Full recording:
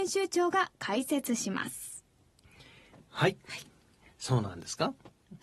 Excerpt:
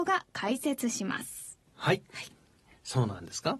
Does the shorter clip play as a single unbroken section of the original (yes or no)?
no